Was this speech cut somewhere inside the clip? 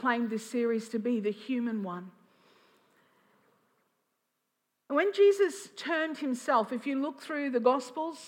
no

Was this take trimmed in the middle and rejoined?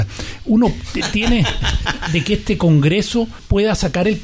yes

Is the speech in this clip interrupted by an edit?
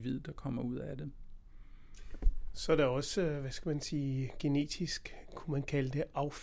no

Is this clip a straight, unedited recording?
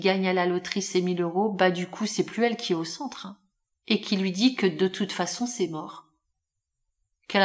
no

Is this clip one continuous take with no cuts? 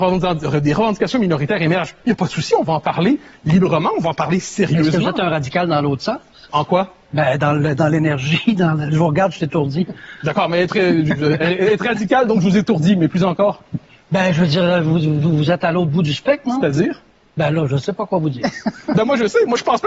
yes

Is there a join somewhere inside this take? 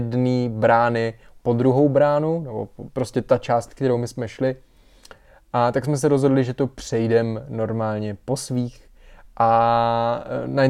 no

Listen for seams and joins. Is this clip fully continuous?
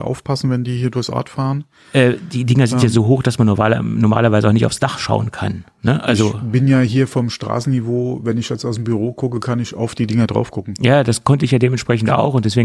yes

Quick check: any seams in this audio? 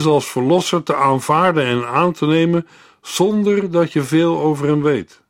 no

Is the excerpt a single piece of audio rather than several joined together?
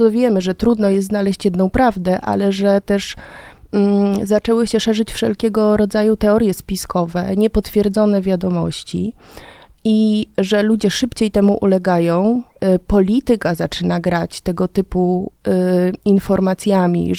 yes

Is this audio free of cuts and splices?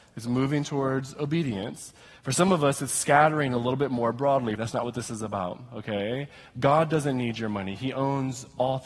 no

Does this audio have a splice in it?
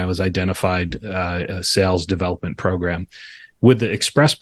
yes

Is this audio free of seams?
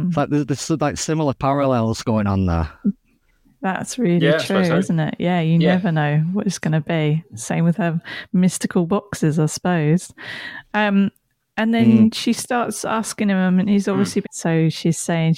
no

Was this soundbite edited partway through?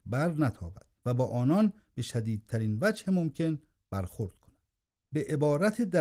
yes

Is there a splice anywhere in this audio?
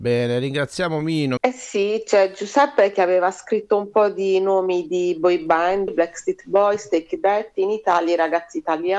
yes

